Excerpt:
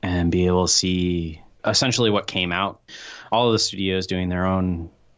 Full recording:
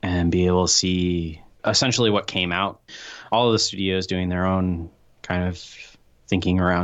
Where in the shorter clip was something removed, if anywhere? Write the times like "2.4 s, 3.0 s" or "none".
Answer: none